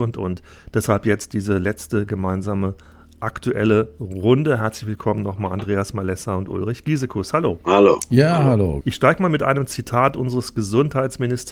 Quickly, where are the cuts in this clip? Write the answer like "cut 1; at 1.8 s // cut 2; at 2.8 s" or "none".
cut 1; at 8.8 s